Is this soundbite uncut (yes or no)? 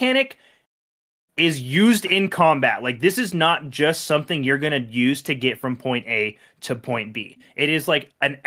yes